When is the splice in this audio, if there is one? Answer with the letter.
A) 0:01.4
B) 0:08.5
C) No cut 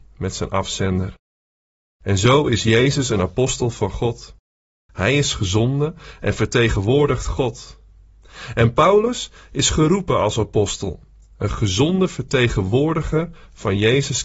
C